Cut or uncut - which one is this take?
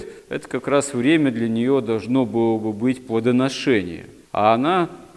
uncut